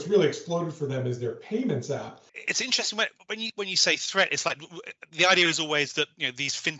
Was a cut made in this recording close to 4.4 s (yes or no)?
no